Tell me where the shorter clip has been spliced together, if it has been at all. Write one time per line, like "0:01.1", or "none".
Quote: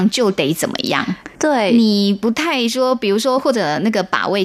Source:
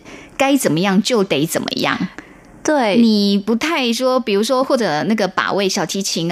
0:01.3

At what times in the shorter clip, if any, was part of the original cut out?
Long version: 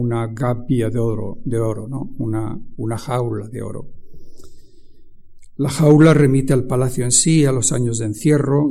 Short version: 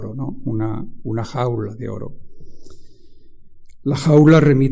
none

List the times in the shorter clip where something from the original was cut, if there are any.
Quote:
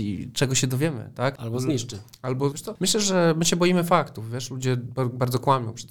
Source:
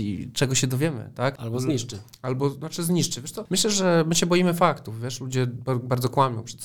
0:02.5

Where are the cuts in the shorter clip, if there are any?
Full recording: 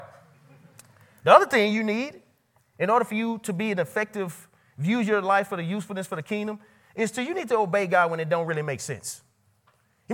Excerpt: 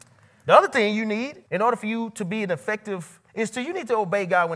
0:01.5
0:03.3

